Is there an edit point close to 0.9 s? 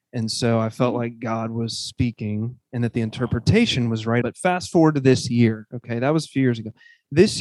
no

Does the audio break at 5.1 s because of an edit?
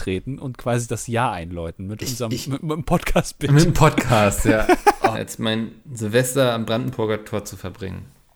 yes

